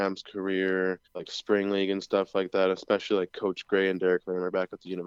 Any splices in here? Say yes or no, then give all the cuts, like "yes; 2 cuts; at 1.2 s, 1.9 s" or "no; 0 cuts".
yes; 1 cut; at 1.0 s